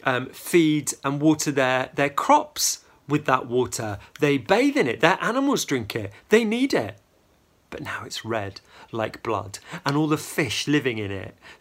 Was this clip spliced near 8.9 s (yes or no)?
no